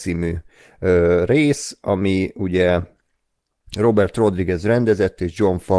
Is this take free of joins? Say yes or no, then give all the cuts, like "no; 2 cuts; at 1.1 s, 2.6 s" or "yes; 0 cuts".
yes; 0 cuts